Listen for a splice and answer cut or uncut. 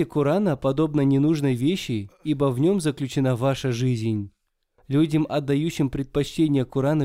cut